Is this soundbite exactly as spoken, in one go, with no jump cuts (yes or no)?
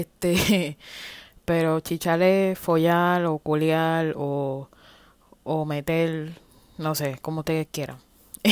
yes